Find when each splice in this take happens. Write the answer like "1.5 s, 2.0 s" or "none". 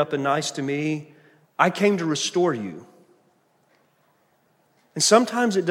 1.4 s